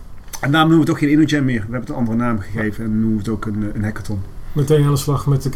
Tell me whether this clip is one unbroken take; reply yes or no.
yes